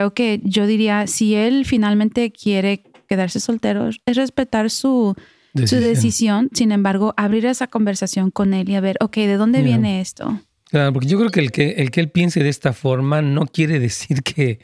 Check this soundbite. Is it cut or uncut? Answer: uncut